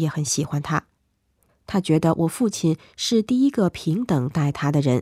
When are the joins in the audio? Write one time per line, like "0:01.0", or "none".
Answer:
0:01.5

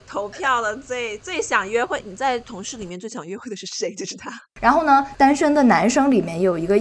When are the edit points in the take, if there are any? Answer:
0:04.5

